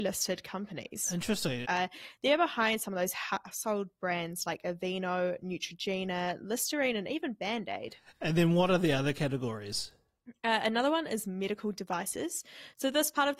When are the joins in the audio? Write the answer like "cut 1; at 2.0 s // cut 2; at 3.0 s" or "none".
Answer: cut 1; at 1.6 s